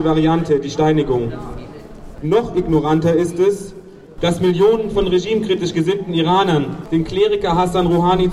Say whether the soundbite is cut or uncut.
cut